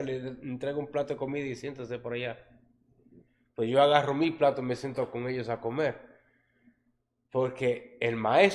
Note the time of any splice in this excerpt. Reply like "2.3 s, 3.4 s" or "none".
none